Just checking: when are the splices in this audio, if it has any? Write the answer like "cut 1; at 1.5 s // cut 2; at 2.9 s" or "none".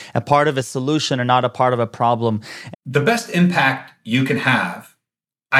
cut 1; at 2.7 s

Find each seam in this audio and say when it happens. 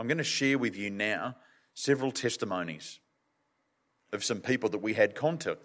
none

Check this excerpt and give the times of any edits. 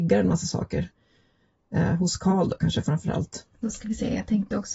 cut 1; at 3.5 s

